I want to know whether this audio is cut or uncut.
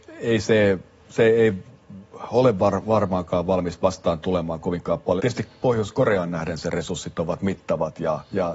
cut